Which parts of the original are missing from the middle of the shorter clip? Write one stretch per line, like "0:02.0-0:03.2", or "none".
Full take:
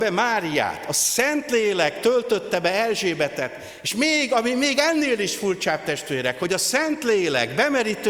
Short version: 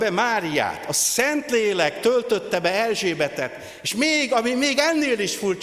none